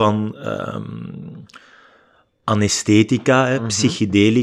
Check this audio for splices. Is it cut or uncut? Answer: uncut